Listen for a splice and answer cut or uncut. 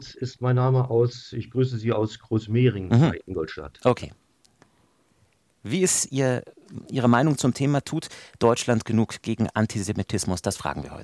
uncut